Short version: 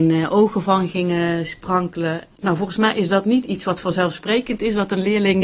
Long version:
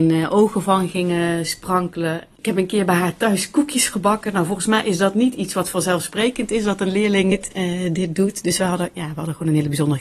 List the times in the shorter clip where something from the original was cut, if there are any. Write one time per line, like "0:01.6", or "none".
0:02.4